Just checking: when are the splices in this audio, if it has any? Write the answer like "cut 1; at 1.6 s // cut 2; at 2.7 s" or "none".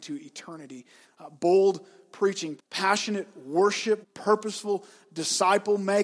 cut 1; at 1.0 s // cut 2; at 2.6 s // cut 3; at 4.0 s